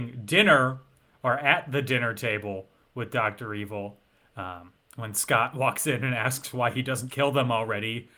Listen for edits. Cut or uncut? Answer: cut